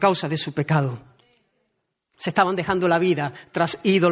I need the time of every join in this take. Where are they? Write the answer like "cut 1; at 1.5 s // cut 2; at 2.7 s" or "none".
cut 1; at 2.1 s

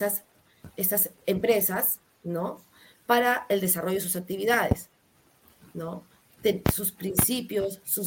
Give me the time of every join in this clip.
none

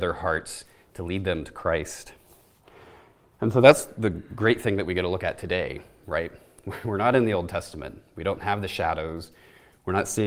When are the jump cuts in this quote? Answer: none

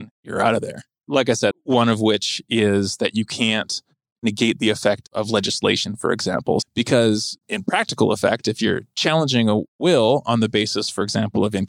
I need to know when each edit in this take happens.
cut 1; at 1.5 s // cut 2; at 6.6 s

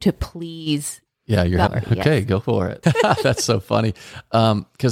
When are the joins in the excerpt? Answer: cut 1; at 1.7 s // cut 2; at 2.8 s

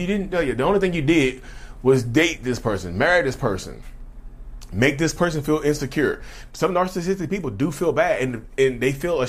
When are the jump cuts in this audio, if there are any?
cut 1; at 6.5 s

